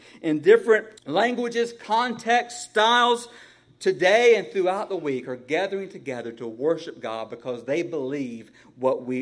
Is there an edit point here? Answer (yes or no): yes